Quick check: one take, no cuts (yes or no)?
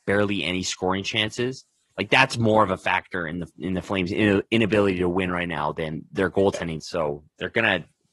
no